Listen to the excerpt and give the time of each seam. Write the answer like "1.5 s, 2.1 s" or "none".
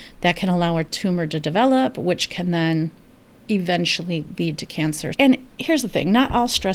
5.1 s